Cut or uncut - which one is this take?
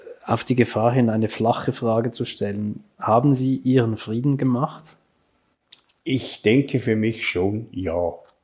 uncut